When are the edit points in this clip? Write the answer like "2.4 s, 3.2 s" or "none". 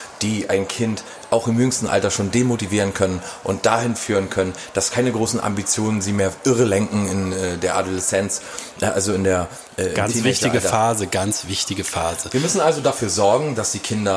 none